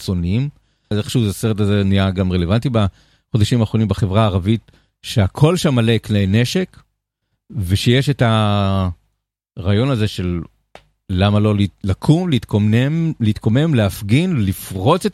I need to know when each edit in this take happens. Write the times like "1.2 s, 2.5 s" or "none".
0.9 s